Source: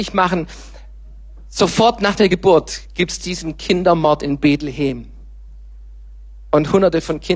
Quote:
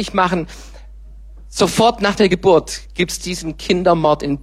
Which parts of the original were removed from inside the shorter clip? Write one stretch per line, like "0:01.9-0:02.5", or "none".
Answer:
none